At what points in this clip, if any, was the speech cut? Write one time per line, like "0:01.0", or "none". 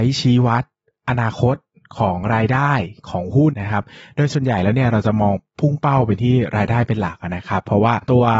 0:03.5